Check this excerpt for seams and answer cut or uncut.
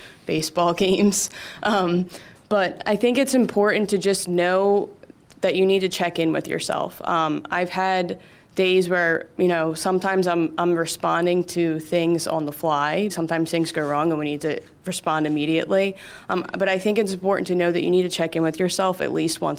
cut